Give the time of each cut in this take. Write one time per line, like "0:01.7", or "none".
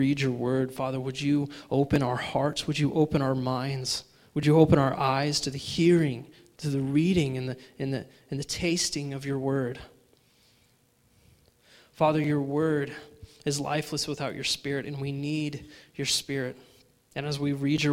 0:17.0